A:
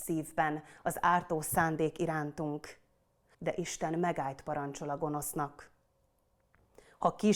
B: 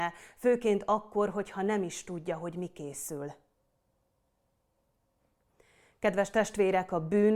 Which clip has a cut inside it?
A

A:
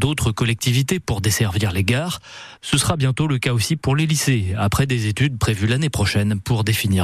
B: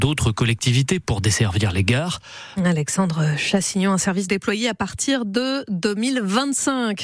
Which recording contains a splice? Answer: B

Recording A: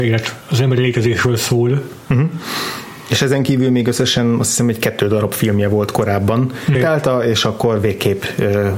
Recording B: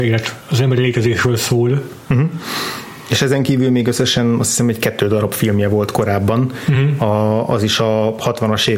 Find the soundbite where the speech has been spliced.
A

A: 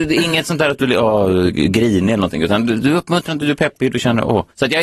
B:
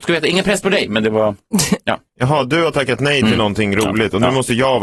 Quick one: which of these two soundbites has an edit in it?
B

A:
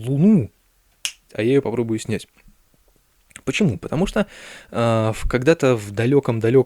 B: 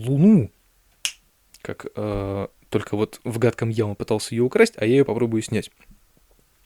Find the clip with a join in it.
A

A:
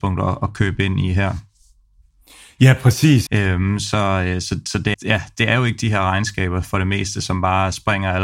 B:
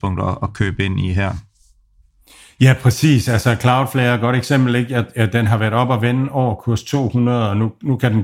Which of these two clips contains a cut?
A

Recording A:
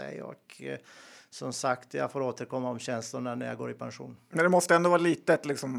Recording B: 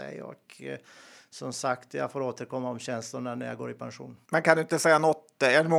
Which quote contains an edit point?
B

